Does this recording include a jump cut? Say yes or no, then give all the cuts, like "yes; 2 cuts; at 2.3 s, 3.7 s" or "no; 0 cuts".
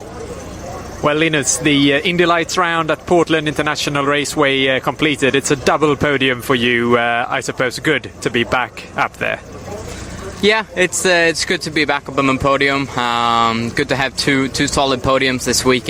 no; 0 cuts